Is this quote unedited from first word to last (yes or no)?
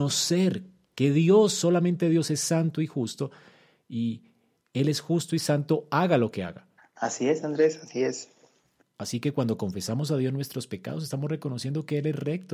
no